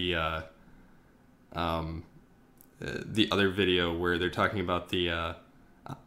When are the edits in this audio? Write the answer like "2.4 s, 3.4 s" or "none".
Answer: none